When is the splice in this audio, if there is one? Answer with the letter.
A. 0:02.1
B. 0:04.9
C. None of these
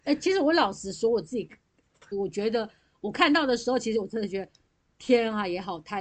A